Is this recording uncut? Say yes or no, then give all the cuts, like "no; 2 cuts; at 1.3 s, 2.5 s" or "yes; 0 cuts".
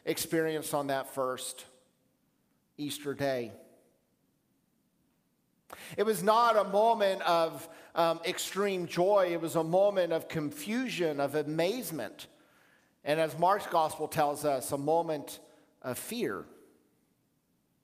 yes; 0 cuts